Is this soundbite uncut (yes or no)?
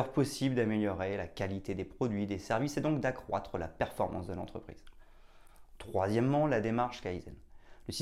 yes